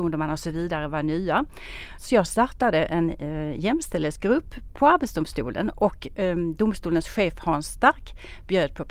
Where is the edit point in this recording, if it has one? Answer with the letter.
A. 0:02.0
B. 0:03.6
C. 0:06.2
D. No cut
A